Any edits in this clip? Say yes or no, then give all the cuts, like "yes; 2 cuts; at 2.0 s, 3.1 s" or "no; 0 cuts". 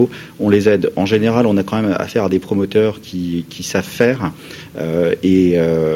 no; 0 cuts